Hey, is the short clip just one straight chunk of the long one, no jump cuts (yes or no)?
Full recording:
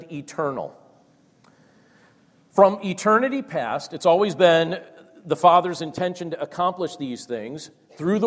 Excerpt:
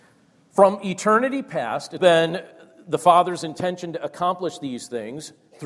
no